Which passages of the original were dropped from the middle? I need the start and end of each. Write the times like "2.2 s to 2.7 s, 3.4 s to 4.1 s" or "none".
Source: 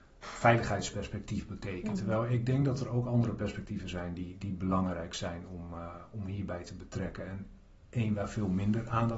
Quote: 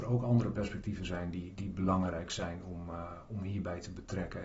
none